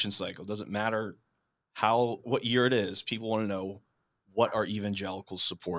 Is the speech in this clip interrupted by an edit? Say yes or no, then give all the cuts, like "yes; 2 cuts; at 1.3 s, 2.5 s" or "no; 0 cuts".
yes; 1 cut; at 2.2 s